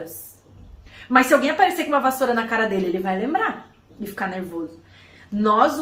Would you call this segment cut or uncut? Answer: uncut